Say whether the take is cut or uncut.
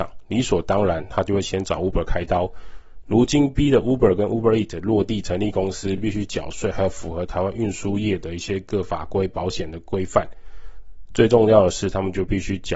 uncut